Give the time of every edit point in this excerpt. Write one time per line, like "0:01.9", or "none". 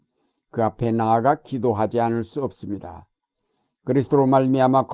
none